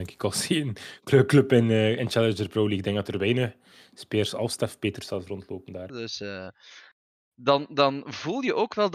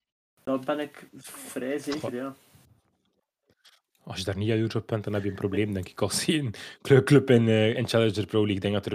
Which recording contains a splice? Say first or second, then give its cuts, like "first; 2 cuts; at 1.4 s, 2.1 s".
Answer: first; 1 cut; at 5.9 s